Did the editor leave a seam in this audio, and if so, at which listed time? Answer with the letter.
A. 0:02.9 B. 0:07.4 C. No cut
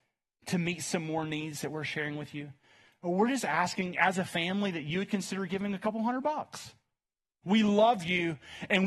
B